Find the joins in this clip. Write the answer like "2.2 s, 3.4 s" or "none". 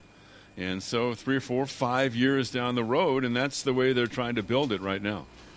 none